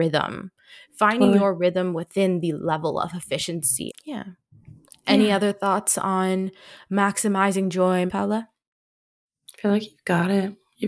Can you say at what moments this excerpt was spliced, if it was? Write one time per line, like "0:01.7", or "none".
0:03.9
0:08.1